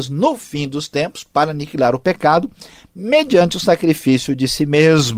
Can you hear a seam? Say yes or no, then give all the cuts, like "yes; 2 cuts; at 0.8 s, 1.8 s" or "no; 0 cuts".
no; 0 cuts